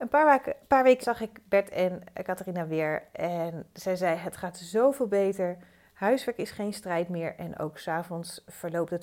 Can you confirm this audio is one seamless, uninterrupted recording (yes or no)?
no